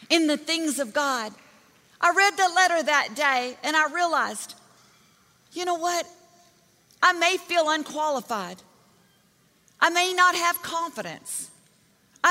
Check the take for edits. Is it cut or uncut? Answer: uncut